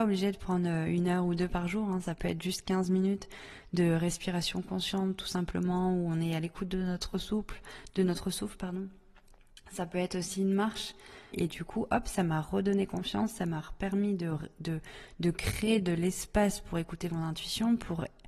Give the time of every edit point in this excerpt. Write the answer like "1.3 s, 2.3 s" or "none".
11.3 s